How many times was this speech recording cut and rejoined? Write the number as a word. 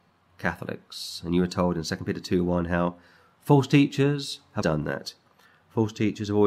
one